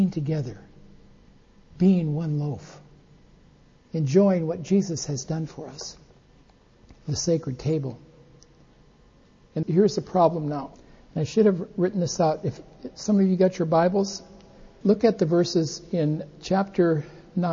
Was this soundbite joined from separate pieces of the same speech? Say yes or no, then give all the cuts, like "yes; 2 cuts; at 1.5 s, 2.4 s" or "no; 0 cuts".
yes; 1 cut; at 9.6 s